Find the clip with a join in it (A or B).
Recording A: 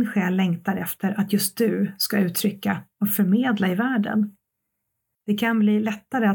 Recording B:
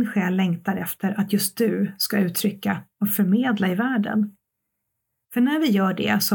A